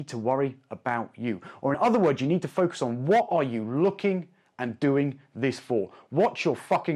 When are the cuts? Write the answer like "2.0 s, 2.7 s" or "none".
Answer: none